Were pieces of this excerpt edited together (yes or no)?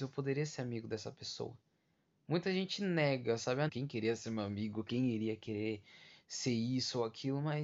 yes